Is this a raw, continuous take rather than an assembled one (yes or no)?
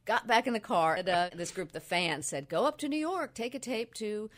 no